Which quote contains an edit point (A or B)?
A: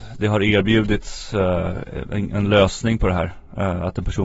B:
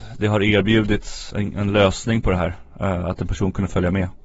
B